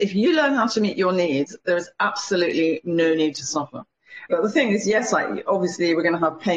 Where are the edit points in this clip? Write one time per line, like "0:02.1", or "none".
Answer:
0:04.3